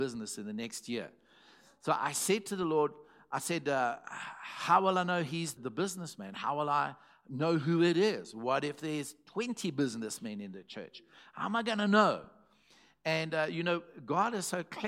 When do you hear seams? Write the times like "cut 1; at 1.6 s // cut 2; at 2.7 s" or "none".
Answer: none